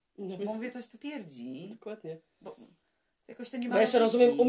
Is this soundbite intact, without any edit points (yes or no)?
yes